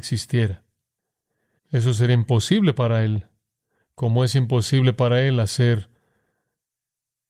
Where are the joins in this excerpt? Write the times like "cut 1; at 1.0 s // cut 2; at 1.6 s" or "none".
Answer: cut 1; at 1.6 s